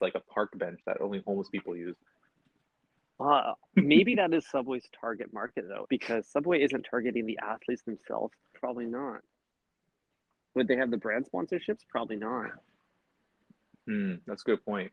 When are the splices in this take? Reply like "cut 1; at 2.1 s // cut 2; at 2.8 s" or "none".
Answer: cut 1; at 3.7 s // cut 2; at 5.8 s // cut 3; at 8.5 s